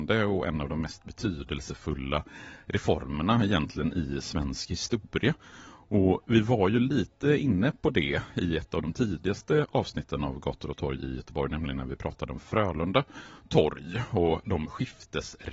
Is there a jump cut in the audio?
no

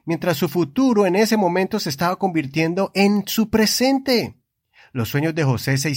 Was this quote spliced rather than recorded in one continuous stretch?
no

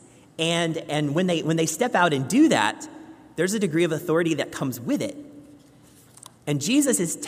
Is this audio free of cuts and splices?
no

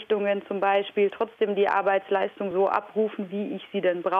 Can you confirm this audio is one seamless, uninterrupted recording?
yes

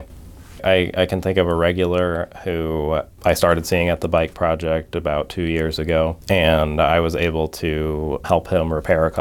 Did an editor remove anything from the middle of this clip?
yes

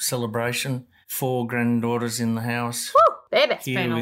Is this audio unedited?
yes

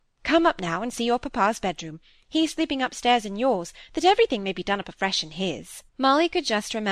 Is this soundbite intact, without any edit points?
no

